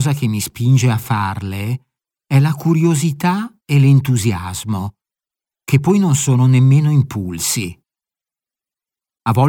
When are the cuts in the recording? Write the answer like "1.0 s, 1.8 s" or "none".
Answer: none